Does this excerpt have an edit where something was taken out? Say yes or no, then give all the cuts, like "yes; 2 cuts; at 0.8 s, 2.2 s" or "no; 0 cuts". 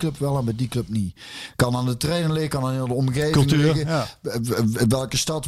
no; 0 cuts